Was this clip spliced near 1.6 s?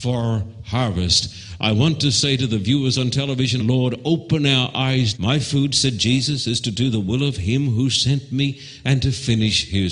no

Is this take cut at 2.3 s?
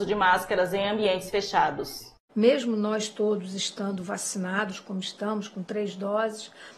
yes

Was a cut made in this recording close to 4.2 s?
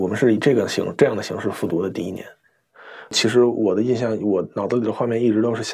no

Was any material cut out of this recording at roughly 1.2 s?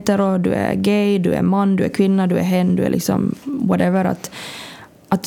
no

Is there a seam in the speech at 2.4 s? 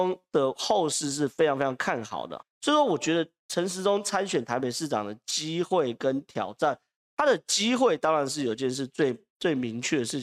yes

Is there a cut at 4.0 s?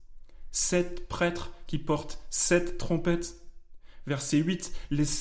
no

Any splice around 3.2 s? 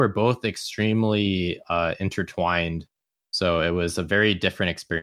no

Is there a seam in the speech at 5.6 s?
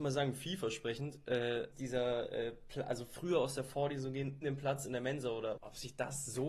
yes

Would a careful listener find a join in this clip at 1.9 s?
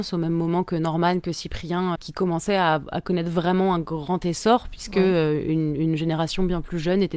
yes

